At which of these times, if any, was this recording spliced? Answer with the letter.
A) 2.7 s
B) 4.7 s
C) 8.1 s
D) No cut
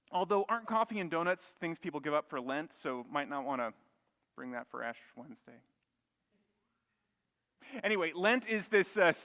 D